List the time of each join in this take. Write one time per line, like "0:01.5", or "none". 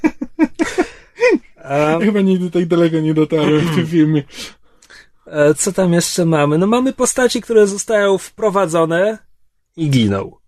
none

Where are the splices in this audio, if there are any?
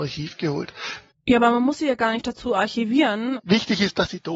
0:01.1
0:03.4

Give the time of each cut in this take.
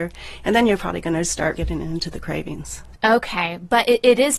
0:01.6

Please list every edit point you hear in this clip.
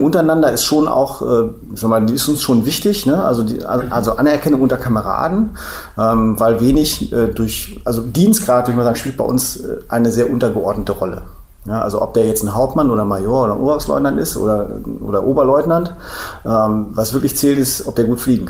none

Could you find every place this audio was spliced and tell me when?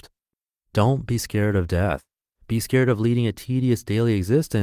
0:02.4

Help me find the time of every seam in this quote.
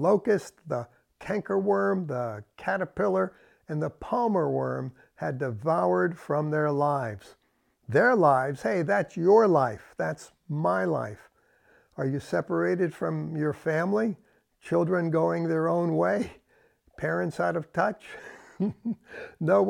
none

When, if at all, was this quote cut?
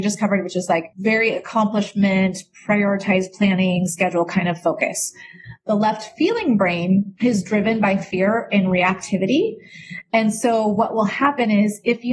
none

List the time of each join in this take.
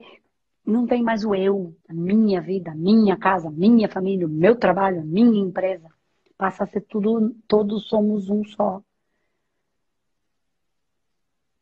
0:01.8

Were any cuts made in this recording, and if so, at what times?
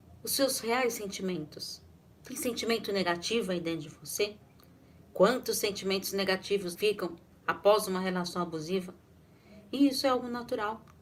0:06.8

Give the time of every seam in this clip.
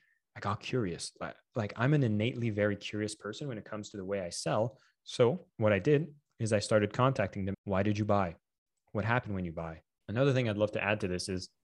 0:07.5
0:10.0

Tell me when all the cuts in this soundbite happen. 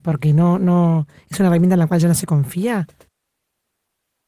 none

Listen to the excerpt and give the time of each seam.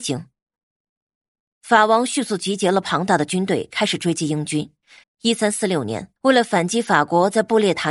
0:05.0
0:06.2

